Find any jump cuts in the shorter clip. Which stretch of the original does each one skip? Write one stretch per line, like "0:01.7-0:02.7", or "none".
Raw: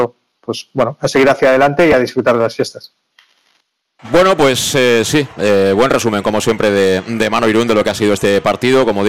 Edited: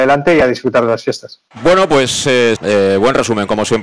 0:03.0-0:04.0
0:05.0-0:05.3